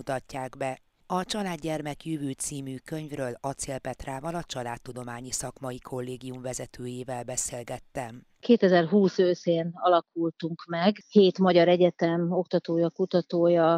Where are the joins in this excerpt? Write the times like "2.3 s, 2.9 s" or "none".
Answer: none